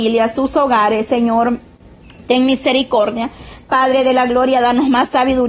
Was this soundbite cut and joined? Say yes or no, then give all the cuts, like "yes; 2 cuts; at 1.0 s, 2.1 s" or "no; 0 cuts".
no; 0 cuts